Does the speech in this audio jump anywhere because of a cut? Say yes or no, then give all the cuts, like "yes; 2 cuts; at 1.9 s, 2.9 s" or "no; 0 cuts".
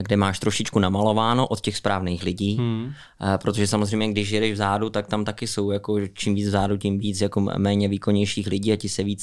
no; 0 cuts